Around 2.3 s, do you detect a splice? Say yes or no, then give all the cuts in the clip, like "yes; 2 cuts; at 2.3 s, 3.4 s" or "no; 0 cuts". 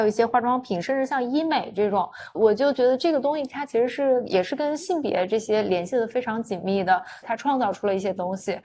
yes; 2 cuts; at 2.3 s, 7.2 s